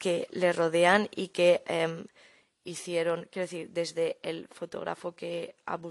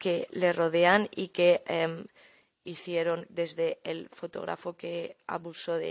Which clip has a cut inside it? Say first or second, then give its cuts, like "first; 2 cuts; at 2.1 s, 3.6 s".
second; 1 cut; at 3.3 s